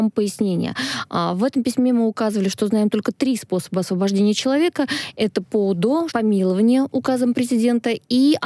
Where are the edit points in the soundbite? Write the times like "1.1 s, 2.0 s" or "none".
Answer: 6.1 s